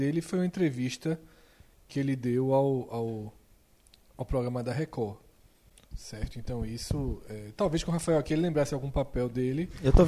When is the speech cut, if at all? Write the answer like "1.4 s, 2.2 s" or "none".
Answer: none